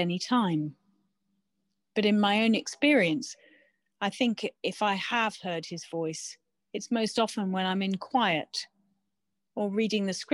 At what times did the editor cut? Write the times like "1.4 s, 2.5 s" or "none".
none